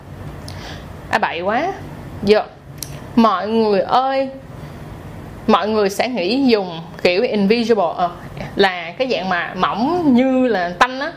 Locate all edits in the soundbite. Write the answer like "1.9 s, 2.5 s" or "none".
none